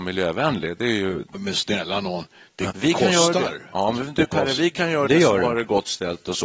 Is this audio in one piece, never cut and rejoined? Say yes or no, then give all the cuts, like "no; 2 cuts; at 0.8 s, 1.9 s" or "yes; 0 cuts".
no; 1 cut; at 2.7 s